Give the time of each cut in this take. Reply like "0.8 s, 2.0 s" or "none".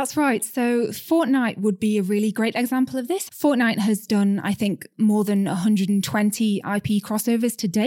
3.3 s